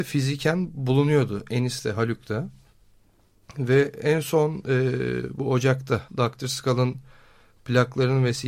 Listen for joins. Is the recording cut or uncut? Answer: cut